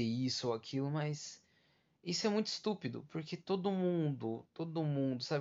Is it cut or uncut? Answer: uncut